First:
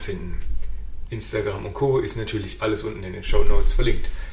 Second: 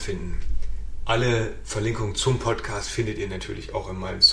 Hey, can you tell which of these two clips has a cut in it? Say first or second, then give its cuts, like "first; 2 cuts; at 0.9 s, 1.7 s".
first; 1 cut; at 1.1 s